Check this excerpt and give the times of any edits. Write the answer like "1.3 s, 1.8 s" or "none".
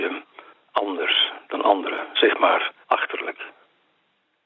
2.8 s